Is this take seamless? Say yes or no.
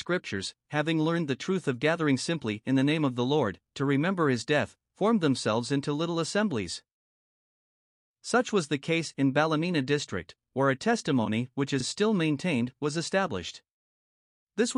yes